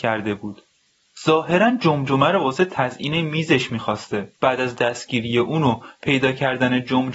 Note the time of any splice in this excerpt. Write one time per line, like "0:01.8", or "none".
0:04.4